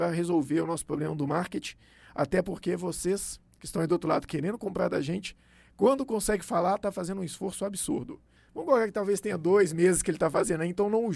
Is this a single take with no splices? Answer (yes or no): no